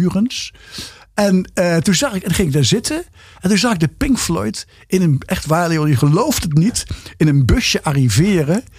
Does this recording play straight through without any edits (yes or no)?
yes